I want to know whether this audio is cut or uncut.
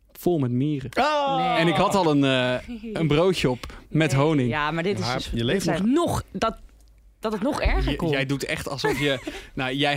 cut